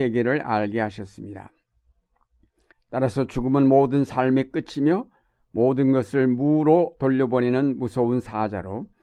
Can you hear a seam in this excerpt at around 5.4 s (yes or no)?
no